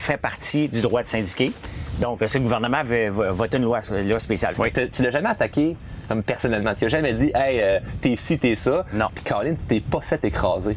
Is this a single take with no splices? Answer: no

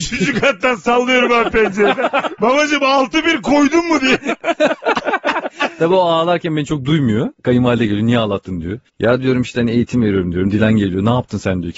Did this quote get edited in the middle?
yes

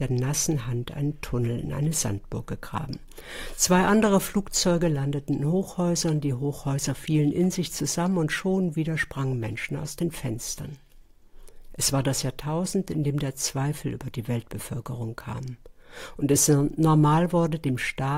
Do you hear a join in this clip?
no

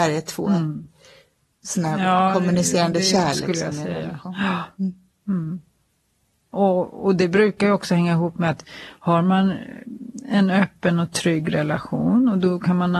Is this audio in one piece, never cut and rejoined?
yes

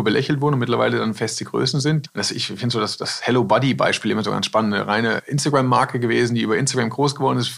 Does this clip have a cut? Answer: no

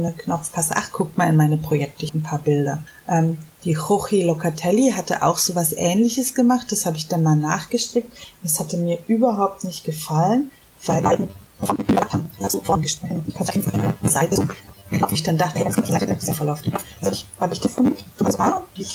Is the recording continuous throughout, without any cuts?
yes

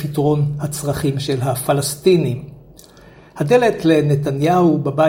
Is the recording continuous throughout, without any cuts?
yes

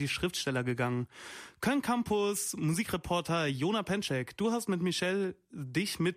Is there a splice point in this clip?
no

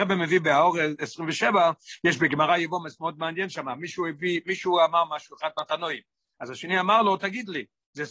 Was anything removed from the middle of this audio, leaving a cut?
no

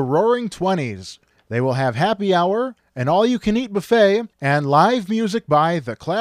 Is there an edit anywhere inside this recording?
yes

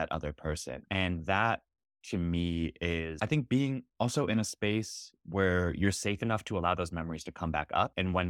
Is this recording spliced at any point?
no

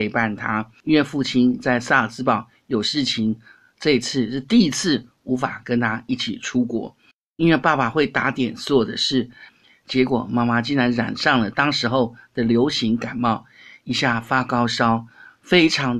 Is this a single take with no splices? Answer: no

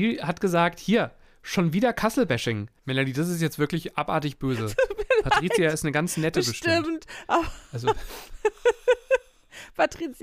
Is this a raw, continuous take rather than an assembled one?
no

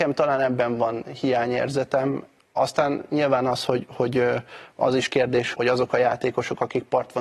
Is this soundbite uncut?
no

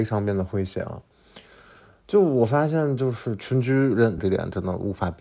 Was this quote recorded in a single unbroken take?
no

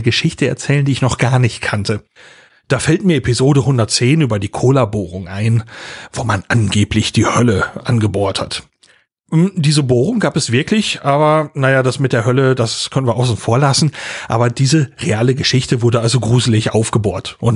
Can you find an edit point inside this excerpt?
no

